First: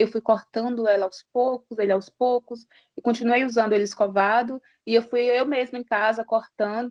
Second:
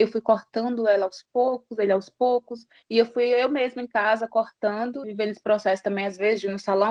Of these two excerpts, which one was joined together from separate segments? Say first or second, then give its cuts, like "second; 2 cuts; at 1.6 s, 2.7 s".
second; 2 cuts; at 2.8 s, 5.0 s